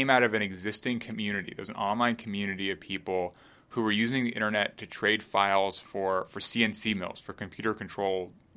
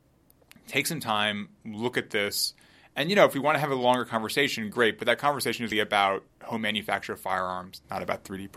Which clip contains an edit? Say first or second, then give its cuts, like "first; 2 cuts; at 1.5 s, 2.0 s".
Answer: second; 1 cut; at 5.7 s